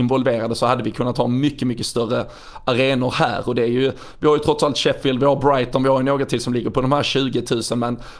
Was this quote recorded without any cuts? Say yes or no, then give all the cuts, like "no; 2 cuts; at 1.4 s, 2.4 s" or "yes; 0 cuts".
yes; 0 cuts